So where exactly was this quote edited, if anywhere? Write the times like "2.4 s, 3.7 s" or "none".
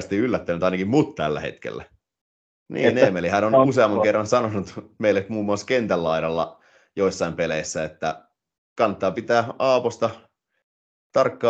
2.7 s